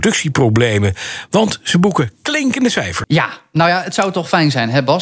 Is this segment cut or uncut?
cut